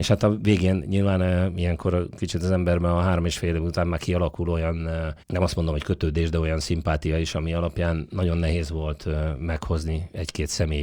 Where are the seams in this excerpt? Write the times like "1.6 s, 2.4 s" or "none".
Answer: 5.2 s

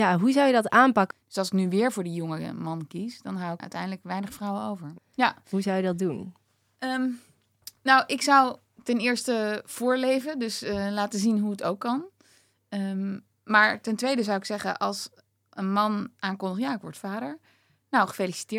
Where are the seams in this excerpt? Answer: 1.1 s, 3.6 s, 5.0 s

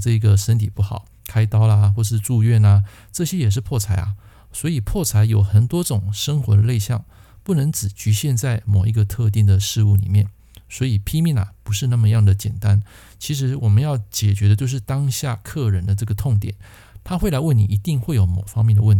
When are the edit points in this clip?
none

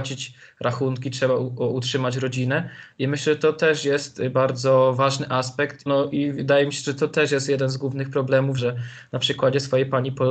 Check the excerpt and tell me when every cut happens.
5.9 s, 8.6 s

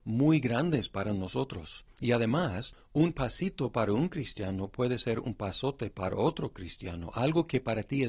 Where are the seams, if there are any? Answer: none

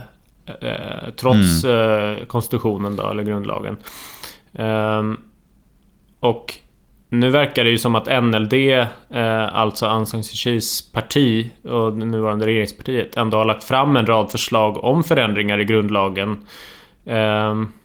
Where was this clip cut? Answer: none

